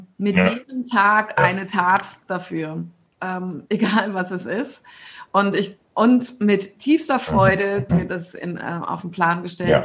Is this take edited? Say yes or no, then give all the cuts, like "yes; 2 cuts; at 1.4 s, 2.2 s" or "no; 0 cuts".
yes; 1 cut; at 7.9 s